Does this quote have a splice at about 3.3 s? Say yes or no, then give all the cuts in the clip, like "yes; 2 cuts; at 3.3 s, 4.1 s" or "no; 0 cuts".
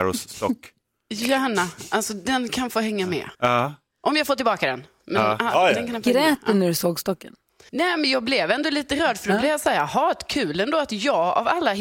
yes; 2 cuts; at 3.3 s, 7.7 s